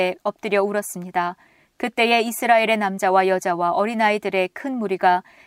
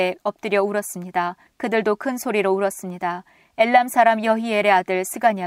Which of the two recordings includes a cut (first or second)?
second